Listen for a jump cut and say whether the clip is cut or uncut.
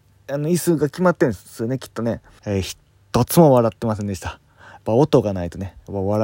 cut